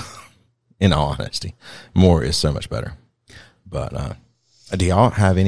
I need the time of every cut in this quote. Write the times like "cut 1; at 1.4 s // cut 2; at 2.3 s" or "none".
none